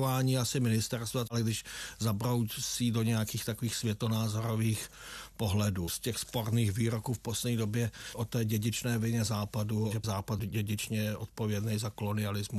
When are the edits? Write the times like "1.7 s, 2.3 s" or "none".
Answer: 5.9 s, 9.9 s